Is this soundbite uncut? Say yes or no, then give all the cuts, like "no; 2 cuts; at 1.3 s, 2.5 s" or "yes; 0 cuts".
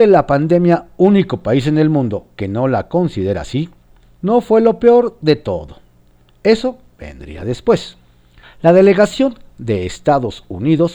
no; 1 cut; at 8.4 s